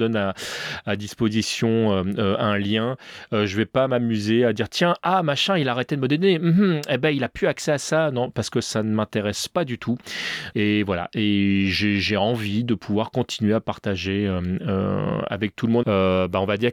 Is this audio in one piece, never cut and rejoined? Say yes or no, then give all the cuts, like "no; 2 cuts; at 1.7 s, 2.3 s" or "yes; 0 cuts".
no; 2 cuts; at 10.5 s, 15.8 s